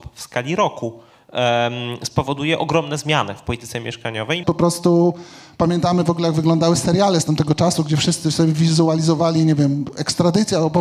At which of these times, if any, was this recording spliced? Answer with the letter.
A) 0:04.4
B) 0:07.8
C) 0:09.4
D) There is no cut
A